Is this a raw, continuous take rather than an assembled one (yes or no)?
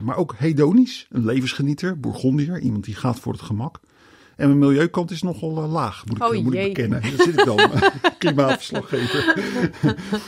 yes